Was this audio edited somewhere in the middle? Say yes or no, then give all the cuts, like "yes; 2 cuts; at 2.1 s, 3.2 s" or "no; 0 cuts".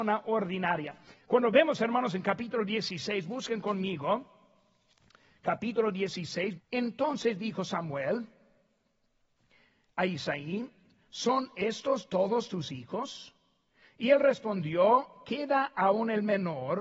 yes; 2 cuts; at 1.1 s, 6.6 s